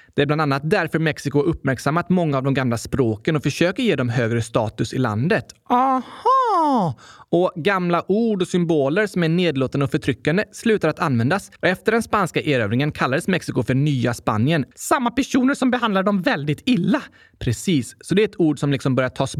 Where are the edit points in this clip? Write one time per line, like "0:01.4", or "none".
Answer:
0:11.6
0:14.7

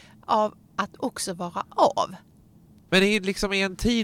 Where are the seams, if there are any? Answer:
0:02.9

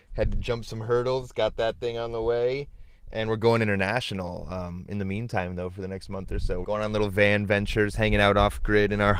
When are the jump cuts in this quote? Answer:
0:06.6

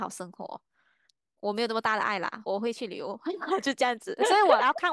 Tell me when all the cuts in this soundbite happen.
0:02.5

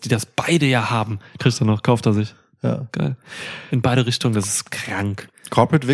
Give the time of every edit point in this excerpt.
0:01.4
0:03.7

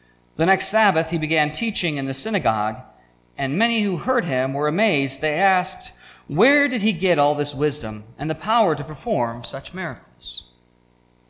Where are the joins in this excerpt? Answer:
none

